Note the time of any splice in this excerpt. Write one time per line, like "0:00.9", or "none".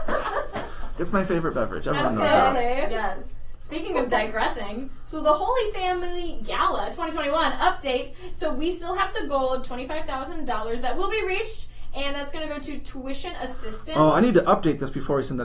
0:01.0